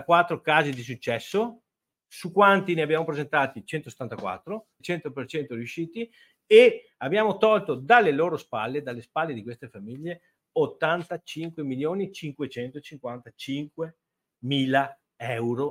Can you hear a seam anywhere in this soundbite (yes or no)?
yes